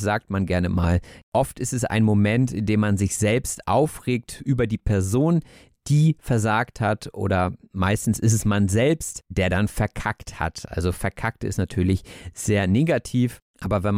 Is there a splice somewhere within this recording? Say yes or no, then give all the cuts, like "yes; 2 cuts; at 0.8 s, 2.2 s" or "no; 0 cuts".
no; 0 cuts